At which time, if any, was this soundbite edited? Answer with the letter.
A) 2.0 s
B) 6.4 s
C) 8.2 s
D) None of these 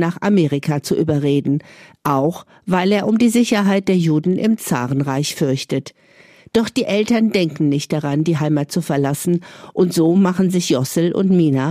D